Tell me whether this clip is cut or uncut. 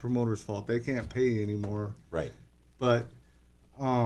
uncut